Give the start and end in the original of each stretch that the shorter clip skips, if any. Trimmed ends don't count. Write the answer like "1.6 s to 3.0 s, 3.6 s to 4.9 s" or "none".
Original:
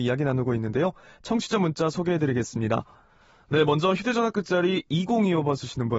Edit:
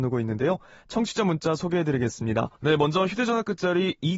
2.9 s to 3.4 s